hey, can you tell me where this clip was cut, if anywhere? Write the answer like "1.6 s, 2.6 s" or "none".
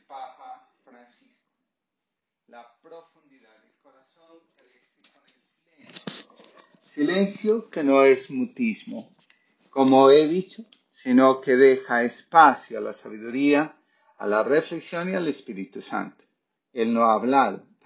16.6 s